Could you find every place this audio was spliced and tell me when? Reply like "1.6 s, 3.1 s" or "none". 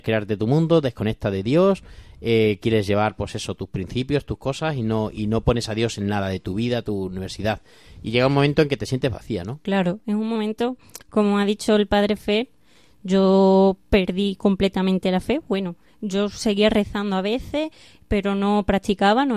none